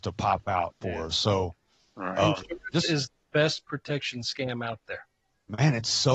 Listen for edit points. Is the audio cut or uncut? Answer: uncut